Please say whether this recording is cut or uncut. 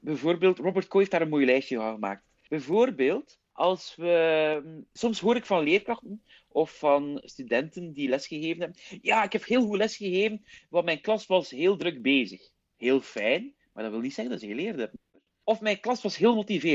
uncut